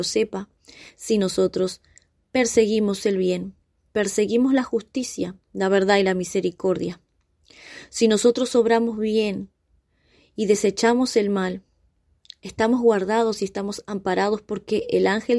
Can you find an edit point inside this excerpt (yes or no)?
no